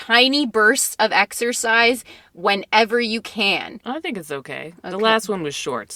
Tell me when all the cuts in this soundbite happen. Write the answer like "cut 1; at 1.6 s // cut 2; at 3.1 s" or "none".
cut 1; at 3.8 s